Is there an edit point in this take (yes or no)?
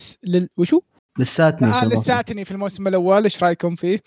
no